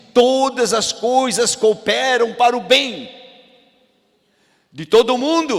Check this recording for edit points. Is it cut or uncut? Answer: uncut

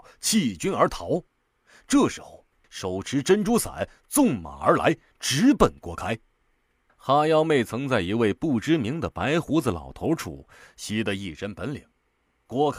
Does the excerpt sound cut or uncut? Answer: cut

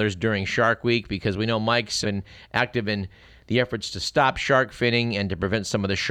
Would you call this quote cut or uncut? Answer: cut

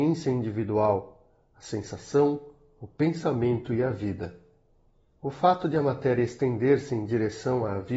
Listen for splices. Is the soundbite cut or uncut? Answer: uncut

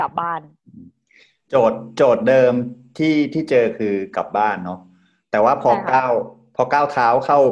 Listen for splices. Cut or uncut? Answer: uncut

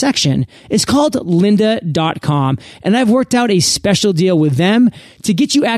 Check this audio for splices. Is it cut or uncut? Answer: uncut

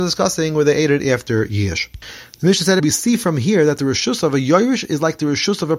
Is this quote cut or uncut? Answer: cut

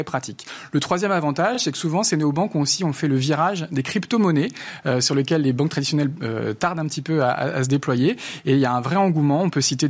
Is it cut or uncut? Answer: uncut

